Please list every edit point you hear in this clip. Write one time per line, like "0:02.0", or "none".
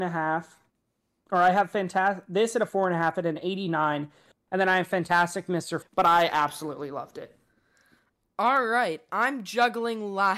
0:05.8